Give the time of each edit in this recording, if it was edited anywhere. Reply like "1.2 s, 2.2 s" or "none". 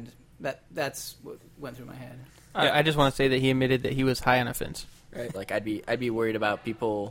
5.3 s